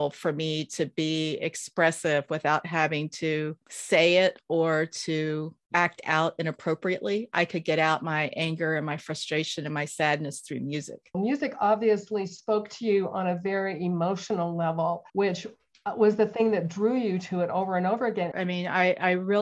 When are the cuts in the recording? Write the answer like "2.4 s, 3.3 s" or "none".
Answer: 11.1 s, 15.1 s, 18.3 s